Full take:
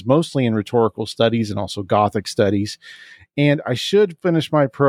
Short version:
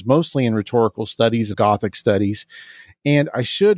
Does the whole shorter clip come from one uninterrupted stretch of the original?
no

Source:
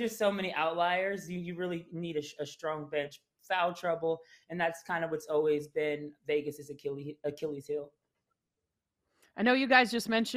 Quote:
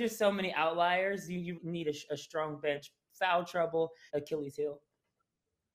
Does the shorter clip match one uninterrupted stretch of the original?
no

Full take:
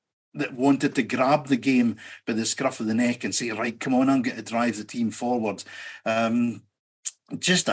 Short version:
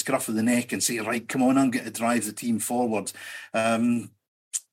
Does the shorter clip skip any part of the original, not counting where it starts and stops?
no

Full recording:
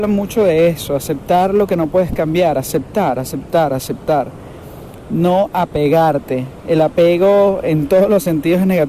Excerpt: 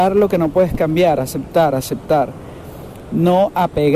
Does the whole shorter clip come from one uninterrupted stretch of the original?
no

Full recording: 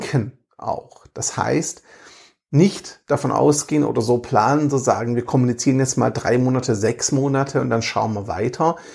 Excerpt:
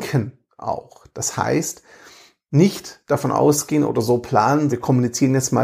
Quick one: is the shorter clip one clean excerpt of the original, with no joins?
no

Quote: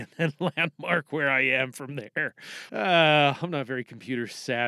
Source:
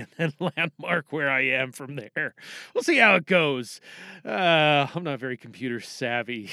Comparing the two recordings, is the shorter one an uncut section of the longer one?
no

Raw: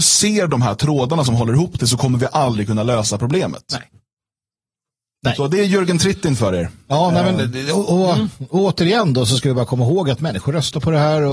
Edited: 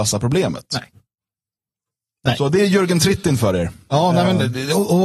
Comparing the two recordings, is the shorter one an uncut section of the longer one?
yes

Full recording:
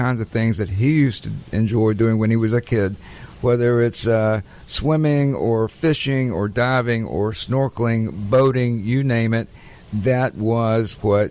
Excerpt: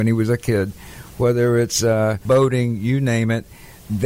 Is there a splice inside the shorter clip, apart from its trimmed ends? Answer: yes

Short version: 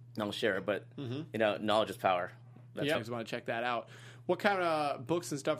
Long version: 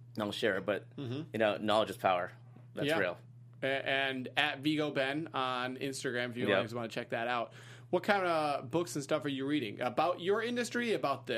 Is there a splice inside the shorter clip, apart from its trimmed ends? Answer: yes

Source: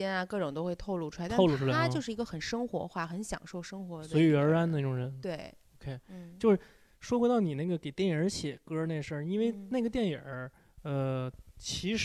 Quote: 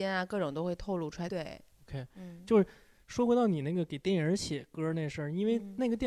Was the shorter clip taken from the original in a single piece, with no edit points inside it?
no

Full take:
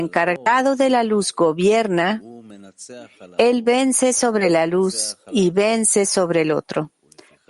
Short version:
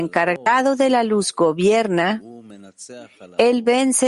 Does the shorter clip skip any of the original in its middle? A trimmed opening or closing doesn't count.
no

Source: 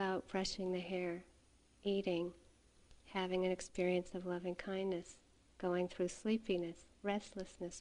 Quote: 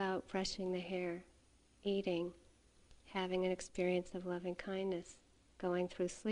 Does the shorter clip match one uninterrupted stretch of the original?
yes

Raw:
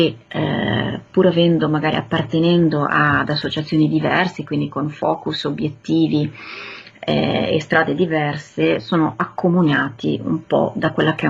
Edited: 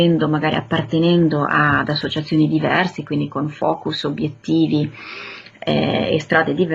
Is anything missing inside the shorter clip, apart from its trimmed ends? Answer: no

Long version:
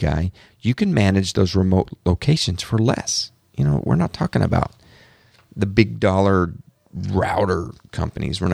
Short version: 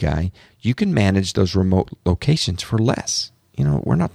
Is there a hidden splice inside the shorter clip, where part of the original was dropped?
no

